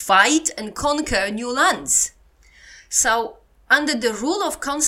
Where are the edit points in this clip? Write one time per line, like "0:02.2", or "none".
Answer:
none

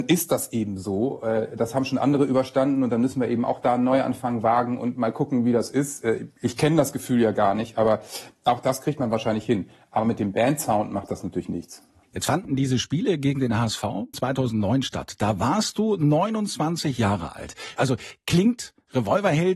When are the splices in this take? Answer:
0:14.1
0:17.8

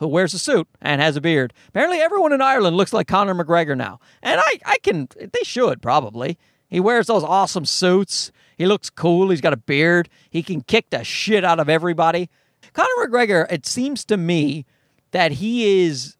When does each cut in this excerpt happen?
0:12.6

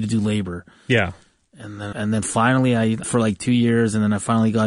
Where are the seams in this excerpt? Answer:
0:01.9
0:03.0

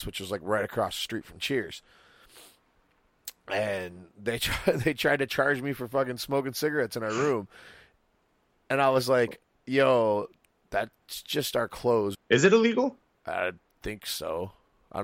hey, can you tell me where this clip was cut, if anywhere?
0:12.1

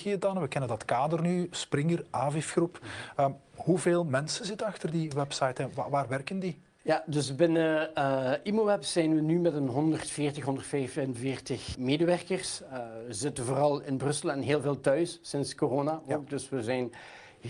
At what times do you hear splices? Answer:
0:11.7

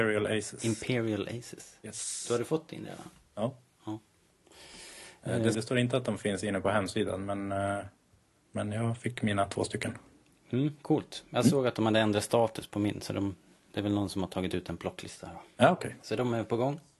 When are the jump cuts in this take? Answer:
0:05.5
0:16.0

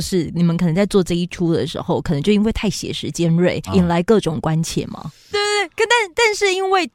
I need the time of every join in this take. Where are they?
0:03.7
0:05.3

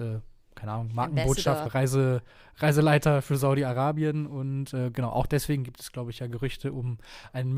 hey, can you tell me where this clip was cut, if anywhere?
0:01.7

